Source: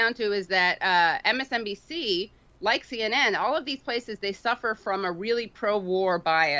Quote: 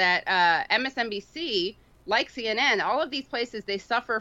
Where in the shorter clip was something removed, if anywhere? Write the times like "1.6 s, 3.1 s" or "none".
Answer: none